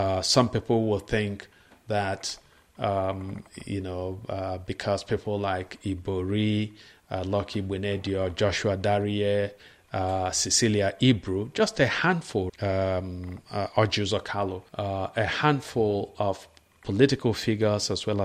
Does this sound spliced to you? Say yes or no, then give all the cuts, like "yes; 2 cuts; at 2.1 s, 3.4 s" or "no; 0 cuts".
yes; 2 cuts; at 12.5 s, 14.7 s